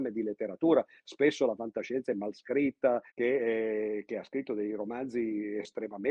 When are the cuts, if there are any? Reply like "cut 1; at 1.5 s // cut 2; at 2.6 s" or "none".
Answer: cut 1; at 3.1 s